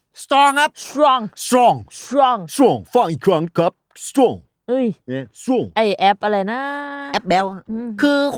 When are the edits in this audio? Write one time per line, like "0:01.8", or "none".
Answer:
none